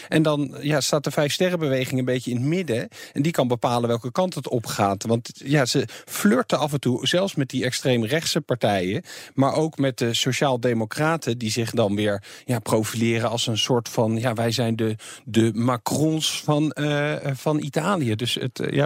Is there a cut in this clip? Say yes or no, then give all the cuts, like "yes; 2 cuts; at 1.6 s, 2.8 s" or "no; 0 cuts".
no; 0 cuts